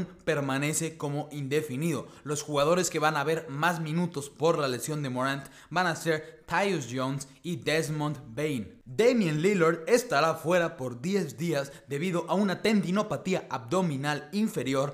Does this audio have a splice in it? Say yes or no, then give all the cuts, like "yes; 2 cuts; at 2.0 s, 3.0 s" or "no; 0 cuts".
yes; 1 cut; at 8.8 s